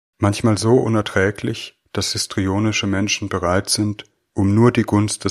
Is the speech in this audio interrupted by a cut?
yes; 1 cut; at 4.3 s

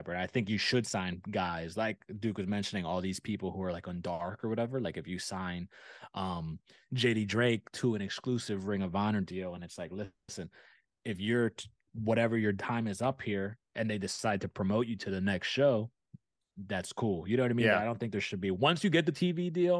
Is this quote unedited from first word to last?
yes; 0 cuts

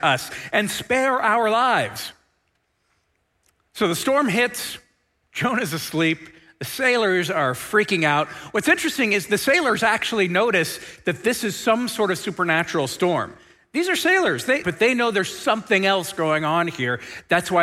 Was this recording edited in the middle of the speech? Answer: yes; 1 cut; at 14.6 s

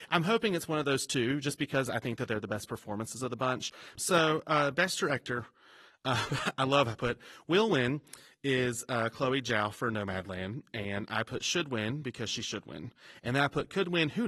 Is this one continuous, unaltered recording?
no; 1 cut; at 4.0 s

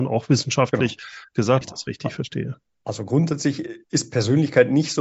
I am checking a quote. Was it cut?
yes; 1 cut; at 1.6 s

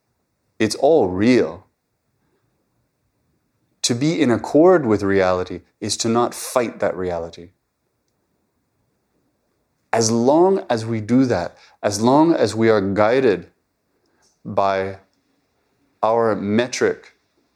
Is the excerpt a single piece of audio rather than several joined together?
no; 1 cut; at 9.8 s

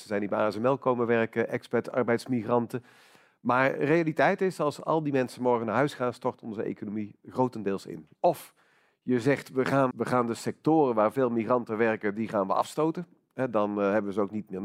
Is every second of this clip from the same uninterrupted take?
no; 2 cuts; at 8.1 s, 9.9 s

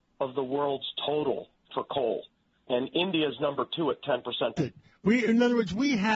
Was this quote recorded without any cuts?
no; 1 cut; at 4.6 s

